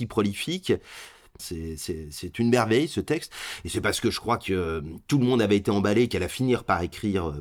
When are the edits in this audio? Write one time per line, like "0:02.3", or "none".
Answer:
0:01.4